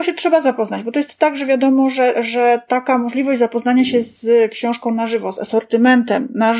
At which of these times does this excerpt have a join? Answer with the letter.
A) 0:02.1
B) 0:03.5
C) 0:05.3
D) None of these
A